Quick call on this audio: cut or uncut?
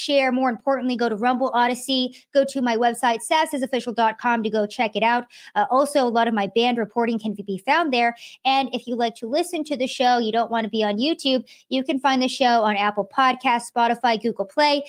uncut